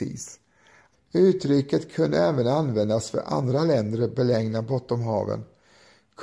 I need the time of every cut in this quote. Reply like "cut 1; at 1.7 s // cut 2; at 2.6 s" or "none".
cut 1; at 0.9 s

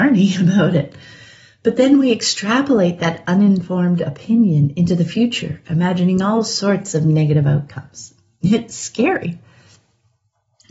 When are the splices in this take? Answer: none

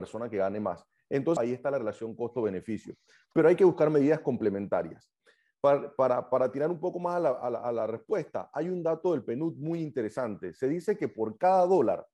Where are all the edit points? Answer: cut 1; at 1.4 s

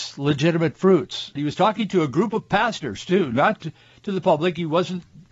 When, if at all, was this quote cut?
cut 1; at 1.4 s

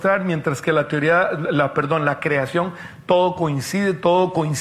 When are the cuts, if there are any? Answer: none

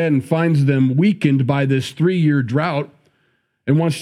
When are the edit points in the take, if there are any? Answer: none

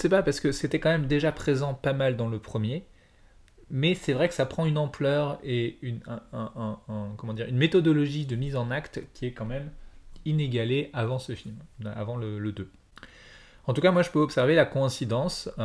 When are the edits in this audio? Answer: none

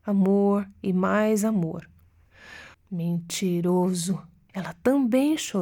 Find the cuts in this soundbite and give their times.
cut 1; at 2.7 s // cut 2; at 4.5 s

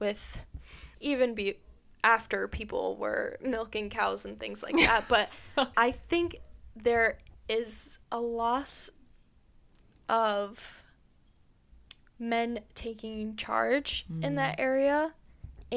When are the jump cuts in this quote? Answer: cut 1; at 0.9 s // cut 2; at 5.7 s // cut 3; at 8.0 s

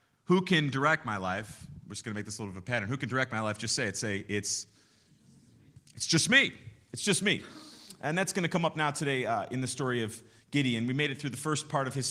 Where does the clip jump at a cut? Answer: none

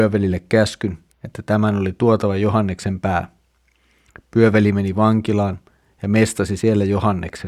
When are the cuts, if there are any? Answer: none

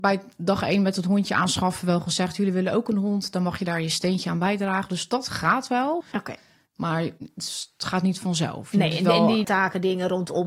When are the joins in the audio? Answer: cut 1; at 6.0 s // cut 2; at 9.4 s

